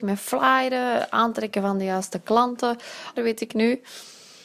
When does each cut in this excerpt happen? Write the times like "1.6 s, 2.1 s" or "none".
3.2 s